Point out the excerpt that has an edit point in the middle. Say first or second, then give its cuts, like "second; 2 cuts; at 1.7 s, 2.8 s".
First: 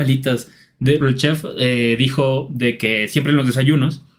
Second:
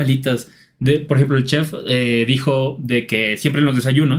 first; 1 cut; at 1.0 s